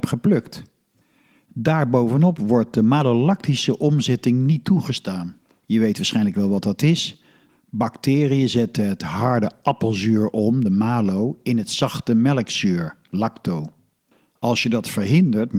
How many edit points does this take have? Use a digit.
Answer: 0